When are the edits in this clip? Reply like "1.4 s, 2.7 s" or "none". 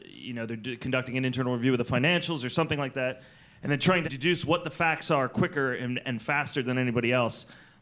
4.0 s